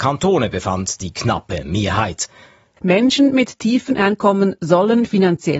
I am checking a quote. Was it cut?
yes; 1 cut; at 2.8 s

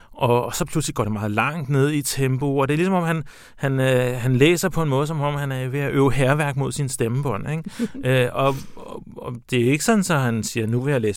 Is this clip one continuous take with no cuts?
yes; 0 cuts

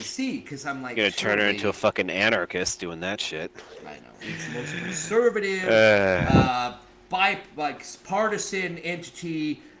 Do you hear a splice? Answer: yes; 1 cut; at 4.2 s

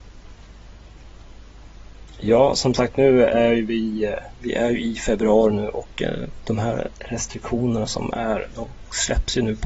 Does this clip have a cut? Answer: no; 0 cuts

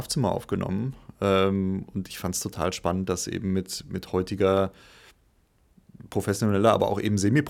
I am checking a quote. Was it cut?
no; 0 cuts

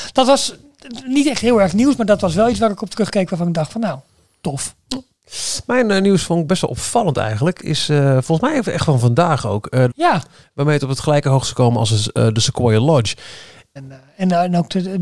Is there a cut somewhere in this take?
yes; 2 cuts; at 9.9 s, 13.8 s

